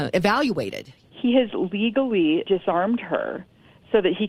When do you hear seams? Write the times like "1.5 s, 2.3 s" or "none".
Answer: 1.0 s, 2.4 s

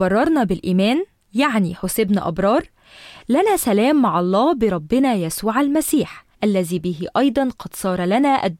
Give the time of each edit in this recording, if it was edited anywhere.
6.3 s

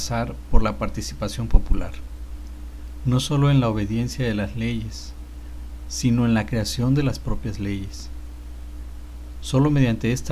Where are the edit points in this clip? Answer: 5.8 s

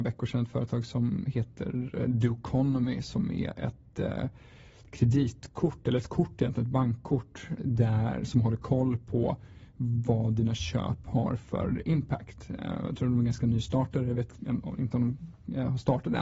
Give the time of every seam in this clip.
7.6 s

